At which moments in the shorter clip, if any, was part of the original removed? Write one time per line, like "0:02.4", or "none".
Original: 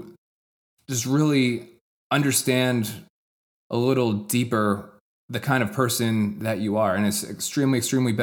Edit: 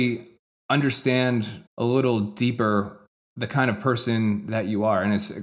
0:01.7